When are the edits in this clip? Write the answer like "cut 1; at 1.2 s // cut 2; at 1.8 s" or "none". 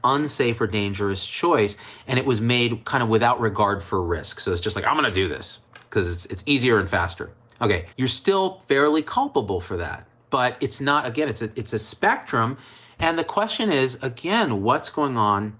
cut 1; at 7.9 s